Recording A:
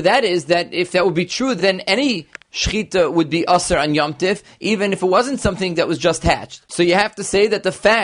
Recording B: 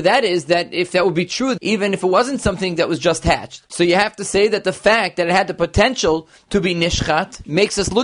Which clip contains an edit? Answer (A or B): B